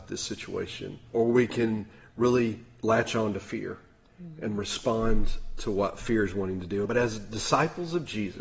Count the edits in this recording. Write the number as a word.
two